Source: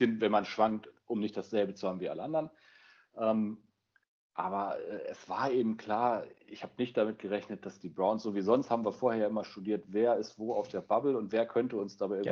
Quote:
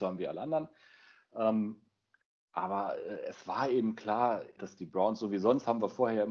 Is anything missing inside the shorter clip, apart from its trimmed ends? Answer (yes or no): yes